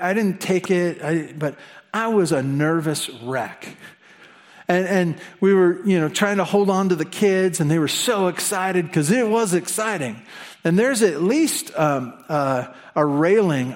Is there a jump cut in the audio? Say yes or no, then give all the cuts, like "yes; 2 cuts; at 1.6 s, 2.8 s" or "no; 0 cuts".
no; 0 cuts